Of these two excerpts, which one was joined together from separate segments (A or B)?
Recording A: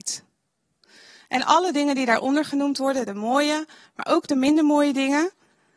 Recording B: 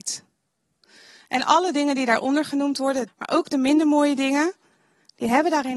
B